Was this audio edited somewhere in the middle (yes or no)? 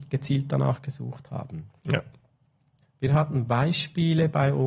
yes